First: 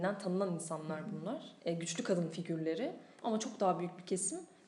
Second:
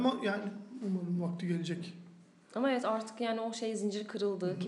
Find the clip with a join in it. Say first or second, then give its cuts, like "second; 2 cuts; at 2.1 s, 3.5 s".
first; 2 cuts; at 1.6 s, 3.2 s